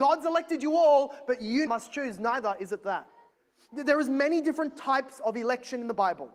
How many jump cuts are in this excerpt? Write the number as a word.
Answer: one